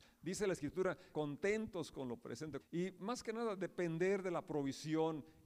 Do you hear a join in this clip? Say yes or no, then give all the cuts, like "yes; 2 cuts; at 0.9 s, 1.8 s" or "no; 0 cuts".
yes; 2 cuts; at 1.1 s, 2.6 s